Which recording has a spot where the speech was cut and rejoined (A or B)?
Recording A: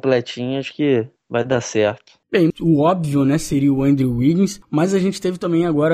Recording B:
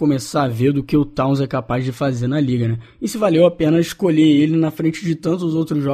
A